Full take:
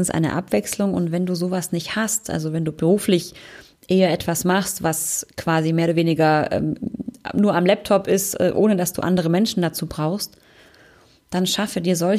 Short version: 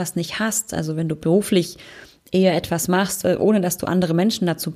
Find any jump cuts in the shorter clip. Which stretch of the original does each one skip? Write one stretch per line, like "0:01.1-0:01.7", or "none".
0:04.8-0:08.4